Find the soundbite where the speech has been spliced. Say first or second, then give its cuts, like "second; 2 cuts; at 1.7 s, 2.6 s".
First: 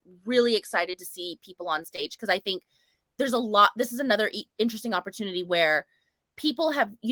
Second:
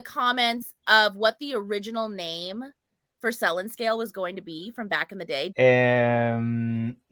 second; 1 cut; at 5.5 s